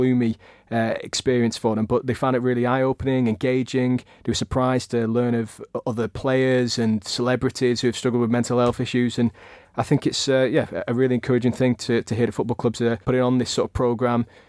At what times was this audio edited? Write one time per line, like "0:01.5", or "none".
0:13.0